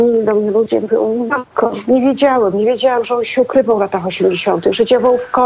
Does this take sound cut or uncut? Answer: uncut